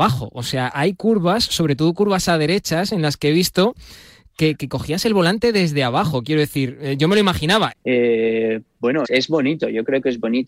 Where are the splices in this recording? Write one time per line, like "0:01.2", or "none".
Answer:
0:07.7
0:09.0

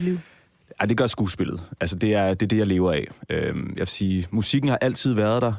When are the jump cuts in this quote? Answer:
none

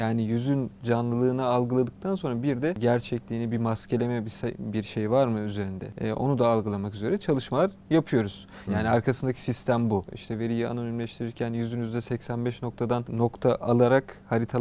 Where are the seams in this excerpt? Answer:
0:08.7
0:10.1

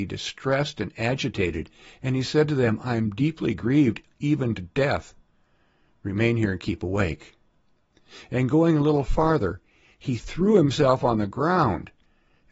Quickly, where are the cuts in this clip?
none

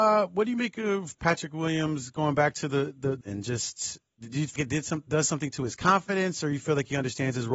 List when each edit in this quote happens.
0:03.2
0:04.6

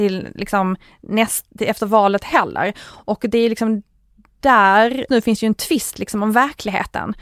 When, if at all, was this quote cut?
0:05.1

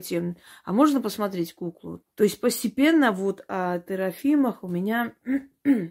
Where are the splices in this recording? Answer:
0:02.0

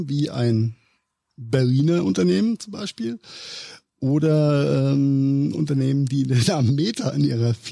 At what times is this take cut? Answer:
none

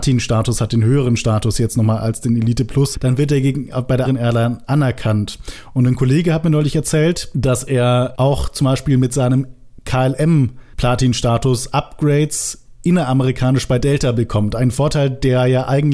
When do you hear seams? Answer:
0:02.9
0:04.0

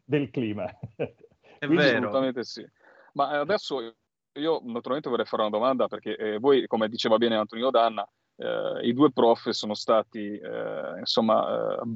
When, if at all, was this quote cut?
none

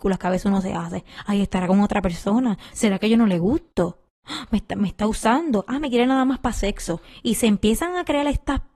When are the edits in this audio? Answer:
0:02.7

